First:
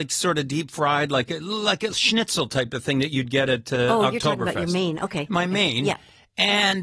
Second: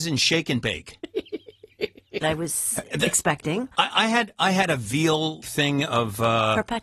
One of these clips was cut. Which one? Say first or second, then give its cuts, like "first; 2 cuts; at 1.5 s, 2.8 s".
second; 2 cuts; at 2.2 s, 5.4 s